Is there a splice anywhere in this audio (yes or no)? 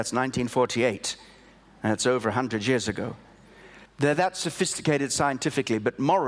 yes